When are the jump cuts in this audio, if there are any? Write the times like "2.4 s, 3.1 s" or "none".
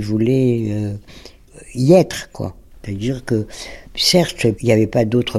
2.7 s